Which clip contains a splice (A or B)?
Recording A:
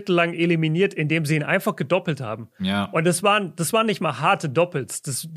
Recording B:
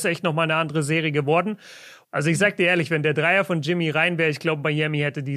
B